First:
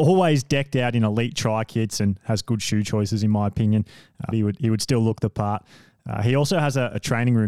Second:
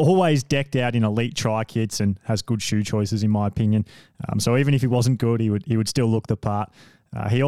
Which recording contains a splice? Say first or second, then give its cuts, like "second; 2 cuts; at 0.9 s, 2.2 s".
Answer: first; 1 cut; at 4.3 s